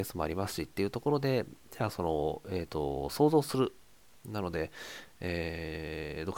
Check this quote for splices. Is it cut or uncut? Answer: cut